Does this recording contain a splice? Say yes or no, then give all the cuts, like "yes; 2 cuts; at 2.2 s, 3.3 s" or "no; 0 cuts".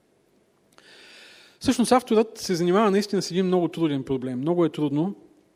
no; 0 cuts